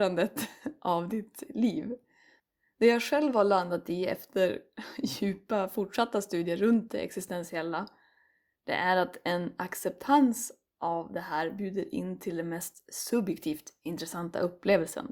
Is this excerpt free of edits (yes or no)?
yes